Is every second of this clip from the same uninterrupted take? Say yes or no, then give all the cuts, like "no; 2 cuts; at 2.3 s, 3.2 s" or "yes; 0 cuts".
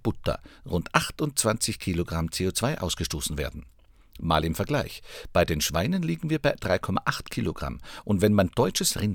yes; 0 cuts